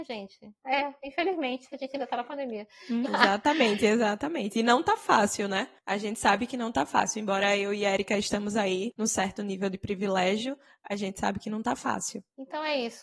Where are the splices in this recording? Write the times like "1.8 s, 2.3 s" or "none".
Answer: 3.1 s